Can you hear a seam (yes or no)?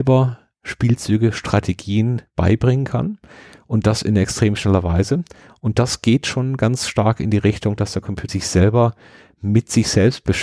yes